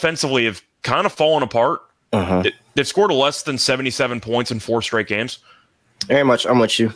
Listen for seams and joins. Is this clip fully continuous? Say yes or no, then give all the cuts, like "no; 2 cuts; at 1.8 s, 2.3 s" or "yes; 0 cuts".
no; 1 cut; at 6.0 s